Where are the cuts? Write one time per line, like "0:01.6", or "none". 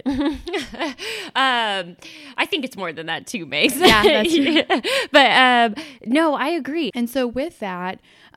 0:06.9